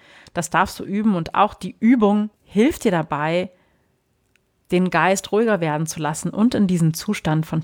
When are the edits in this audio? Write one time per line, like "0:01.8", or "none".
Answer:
0:02.4